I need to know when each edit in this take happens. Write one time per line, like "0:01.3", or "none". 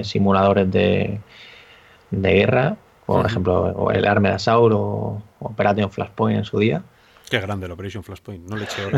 none